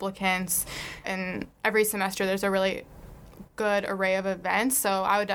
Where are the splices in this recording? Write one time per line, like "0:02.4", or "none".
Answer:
0:01.0